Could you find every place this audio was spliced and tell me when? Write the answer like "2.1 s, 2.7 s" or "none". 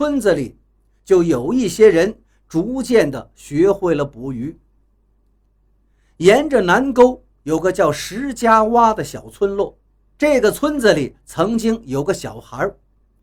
10.1 s